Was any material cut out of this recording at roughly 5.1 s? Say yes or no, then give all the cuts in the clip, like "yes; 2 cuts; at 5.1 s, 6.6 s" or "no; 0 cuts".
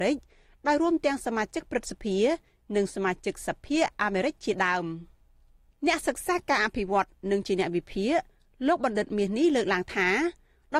no; 0 cuts